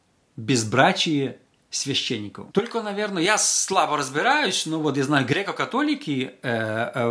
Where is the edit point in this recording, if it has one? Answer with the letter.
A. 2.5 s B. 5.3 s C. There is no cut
A